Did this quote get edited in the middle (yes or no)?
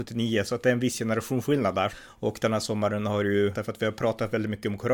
yes